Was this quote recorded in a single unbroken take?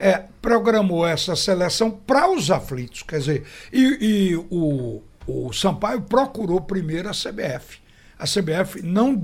yes; 0 cuts

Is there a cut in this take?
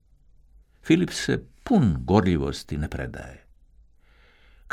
no; 0 cuts

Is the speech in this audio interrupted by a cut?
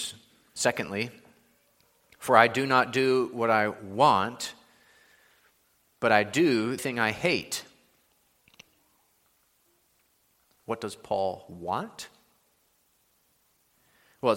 yes; 1 cut; at 6.8 s

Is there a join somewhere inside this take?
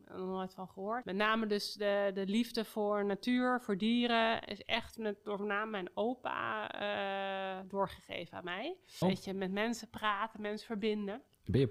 yes; 2 cuts; at 1.0 s, 9.0 s

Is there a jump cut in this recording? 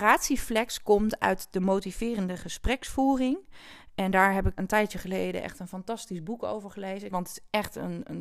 yes; 2 cuts; at 4.6 s, 7.1 s

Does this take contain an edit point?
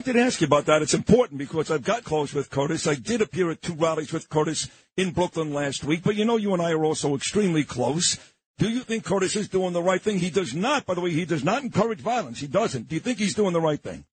yes; 1 cut; at 2.0 s

